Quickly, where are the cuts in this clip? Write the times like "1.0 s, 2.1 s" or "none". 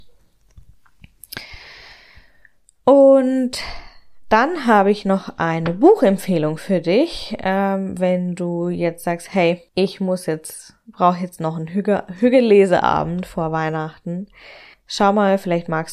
9.7 s, 14.7 s